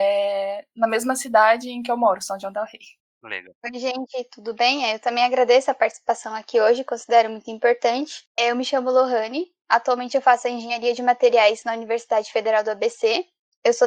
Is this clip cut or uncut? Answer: uncut